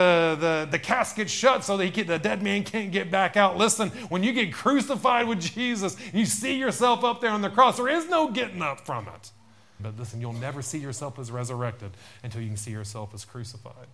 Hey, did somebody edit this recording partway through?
yes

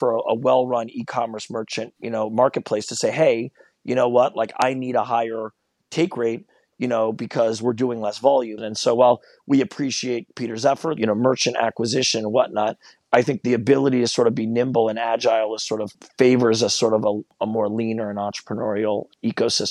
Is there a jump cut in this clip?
yes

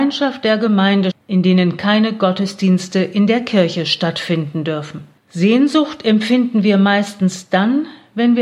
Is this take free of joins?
no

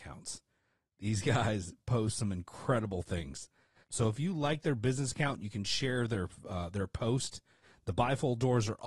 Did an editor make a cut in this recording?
yes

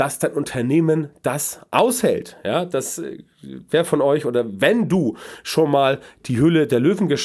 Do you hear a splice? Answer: no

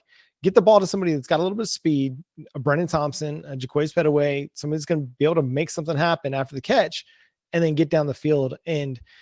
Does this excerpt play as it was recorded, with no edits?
yes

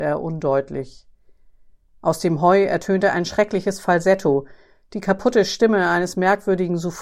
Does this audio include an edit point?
no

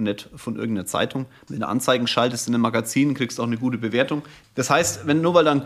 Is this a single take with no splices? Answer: no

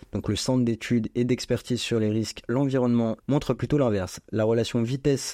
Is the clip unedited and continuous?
no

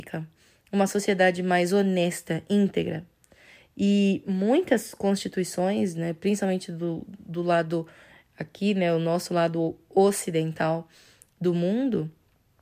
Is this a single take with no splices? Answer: yes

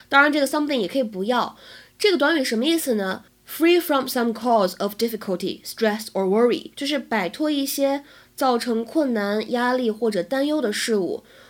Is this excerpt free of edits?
no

